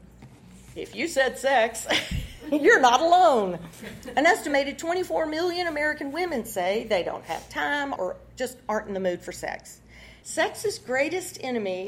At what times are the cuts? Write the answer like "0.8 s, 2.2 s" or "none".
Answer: 8.0 s, 10.2 s